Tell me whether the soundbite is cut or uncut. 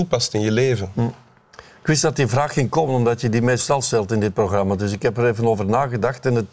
uncut